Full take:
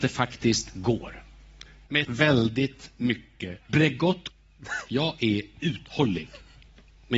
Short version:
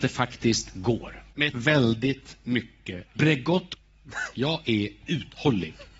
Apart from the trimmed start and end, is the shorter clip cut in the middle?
yes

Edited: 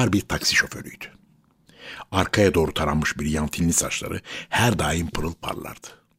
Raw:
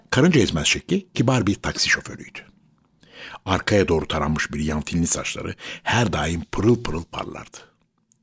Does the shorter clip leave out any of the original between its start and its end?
yes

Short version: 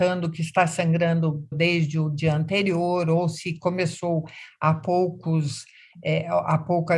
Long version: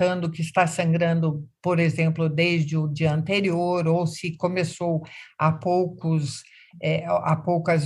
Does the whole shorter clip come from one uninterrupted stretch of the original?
no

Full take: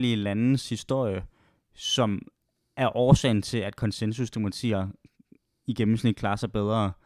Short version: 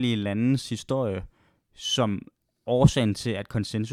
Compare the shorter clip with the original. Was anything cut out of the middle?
yes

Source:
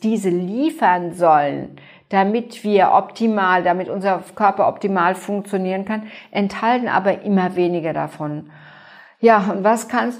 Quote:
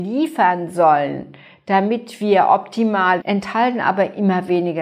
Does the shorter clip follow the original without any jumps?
no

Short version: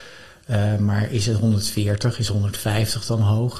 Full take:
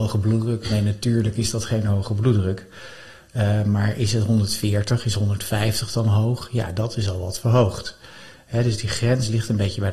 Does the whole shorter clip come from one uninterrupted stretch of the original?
yes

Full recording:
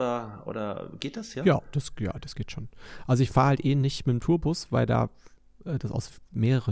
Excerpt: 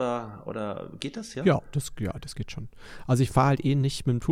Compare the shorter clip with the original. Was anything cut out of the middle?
no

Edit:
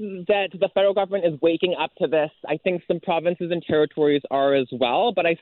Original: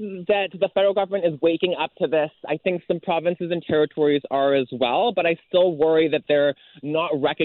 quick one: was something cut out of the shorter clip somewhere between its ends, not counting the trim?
no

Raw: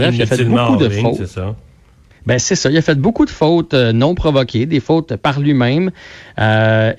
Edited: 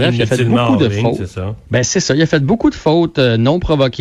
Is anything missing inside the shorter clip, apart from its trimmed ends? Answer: yes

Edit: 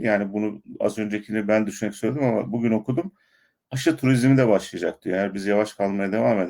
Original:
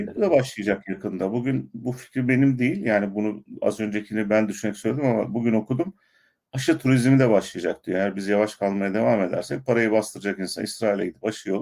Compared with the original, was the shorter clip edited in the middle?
no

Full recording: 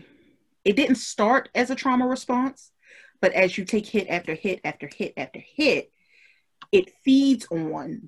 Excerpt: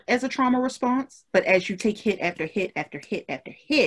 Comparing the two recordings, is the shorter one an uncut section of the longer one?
no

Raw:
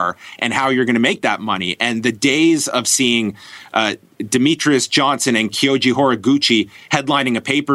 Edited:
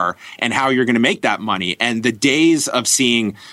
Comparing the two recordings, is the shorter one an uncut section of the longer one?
yes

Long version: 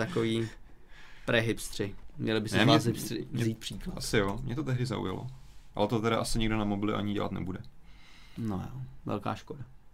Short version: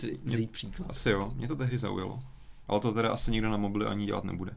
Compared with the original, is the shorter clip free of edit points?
yes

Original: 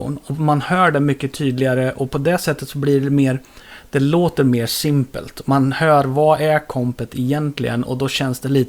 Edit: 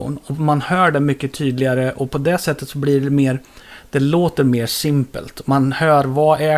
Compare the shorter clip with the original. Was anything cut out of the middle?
no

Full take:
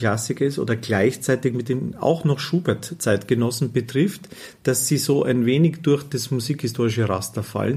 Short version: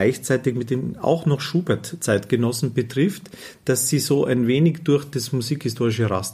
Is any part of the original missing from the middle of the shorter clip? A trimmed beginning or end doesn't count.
no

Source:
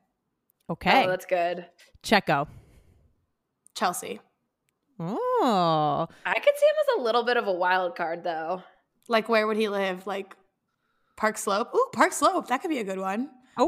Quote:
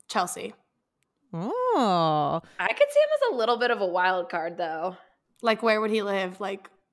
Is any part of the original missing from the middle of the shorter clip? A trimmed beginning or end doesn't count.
no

